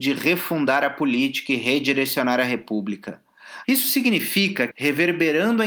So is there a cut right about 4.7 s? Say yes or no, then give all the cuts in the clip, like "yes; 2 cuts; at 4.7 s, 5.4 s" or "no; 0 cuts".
yes; 2 cuts; at 3.6 s, 4.7 s